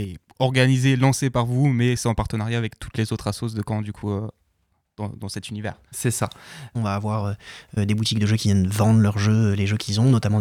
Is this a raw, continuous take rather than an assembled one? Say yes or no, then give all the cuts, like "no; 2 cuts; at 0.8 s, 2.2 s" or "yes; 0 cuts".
no; 1 cut; at 6.7 s